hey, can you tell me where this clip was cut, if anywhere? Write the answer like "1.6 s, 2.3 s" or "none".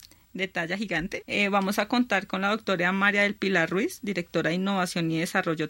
1.2 s

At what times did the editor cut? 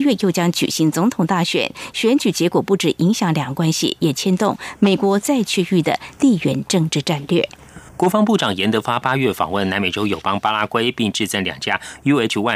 7.9 s

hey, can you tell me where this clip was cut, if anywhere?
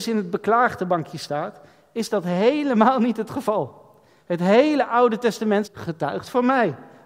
4.2 s, 5.6 s

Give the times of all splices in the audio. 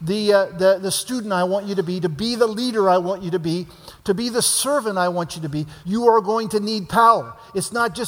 5.8 s

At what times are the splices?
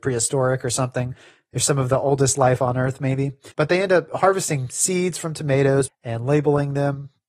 3.5 s, 5.9 s

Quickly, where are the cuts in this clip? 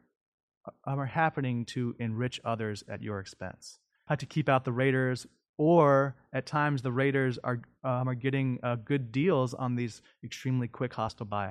4.1 s

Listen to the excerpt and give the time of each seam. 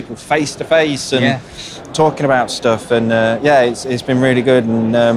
none

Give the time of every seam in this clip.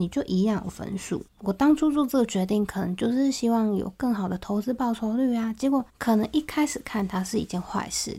1.3 s, 5.9 s

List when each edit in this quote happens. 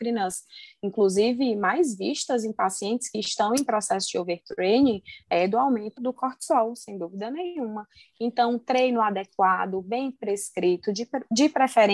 6.0 s

